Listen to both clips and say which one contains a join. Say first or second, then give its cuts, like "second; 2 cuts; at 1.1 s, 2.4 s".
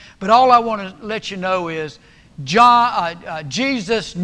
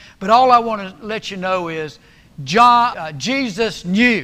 second; 1 cut; at 2.9 s